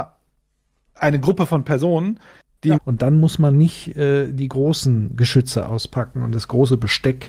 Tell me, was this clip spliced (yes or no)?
yes